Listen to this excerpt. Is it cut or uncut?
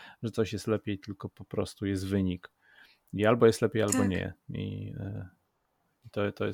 uncut